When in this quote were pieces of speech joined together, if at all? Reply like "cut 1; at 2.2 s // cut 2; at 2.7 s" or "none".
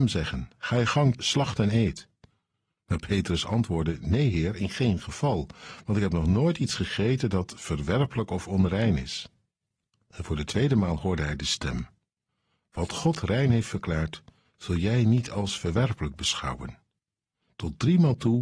cut 1; at 1.2 s